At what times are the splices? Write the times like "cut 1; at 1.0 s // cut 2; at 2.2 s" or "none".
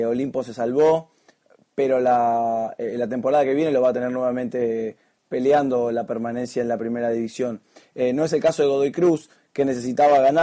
none